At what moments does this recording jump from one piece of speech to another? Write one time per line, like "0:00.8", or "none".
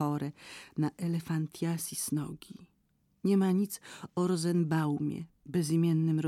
none